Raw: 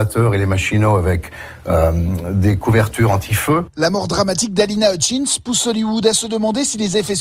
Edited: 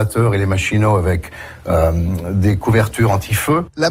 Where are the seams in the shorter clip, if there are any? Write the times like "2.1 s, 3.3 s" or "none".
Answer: none